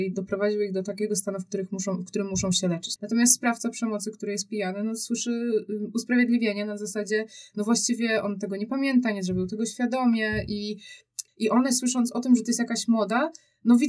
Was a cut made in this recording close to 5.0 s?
no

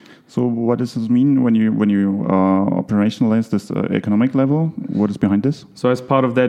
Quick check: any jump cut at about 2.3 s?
no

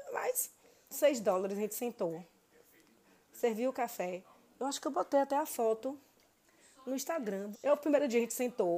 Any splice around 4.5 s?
no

